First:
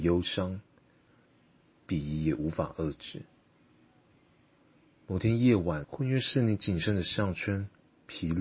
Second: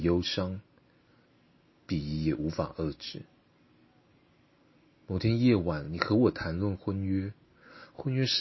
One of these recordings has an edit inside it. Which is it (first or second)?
first